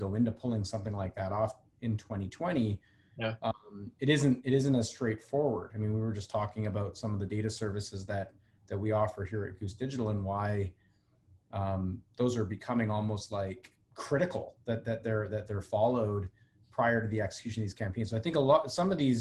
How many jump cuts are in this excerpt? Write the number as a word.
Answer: one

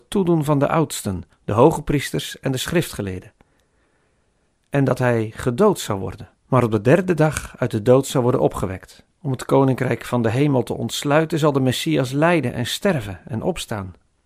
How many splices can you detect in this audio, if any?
three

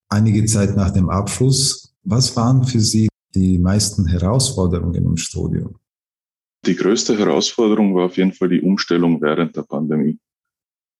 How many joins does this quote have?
one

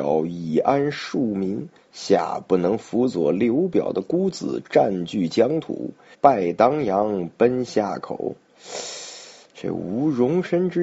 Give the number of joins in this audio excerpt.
one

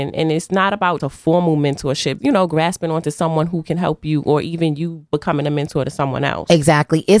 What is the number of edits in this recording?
two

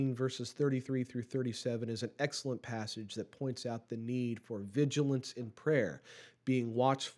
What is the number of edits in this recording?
zero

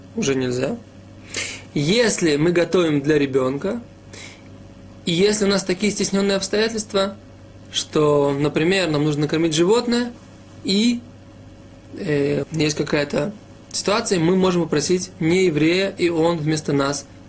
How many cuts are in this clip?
one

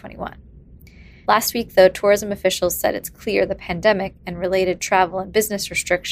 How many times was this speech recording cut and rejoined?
one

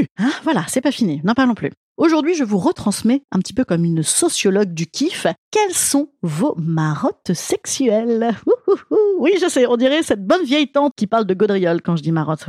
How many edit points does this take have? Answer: two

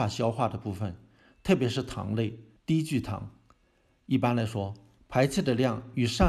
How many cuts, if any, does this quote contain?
one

